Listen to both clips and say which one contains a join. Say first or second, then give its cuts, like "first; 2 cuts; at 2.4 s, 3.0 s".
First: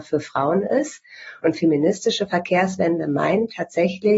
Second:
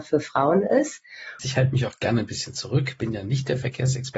second; 1 cut; at 1.4 s